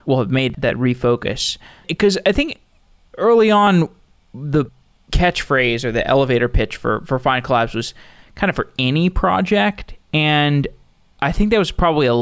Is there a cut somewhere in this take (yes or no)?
no